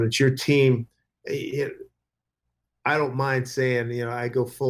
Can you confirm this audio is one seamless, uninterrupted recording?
yes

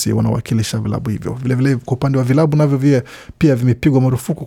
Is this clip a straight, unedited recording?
yes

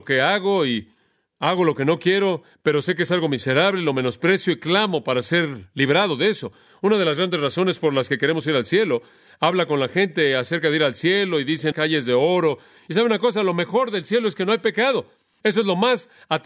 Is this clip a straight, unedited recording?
no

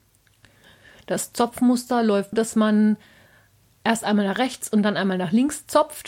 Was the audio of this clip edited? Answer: yes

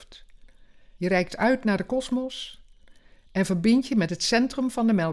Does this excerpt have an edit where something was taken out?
yes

